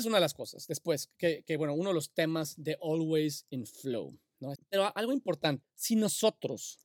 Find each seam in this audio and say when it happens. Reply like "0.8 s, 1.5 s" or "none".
4.5 s, 5.6 s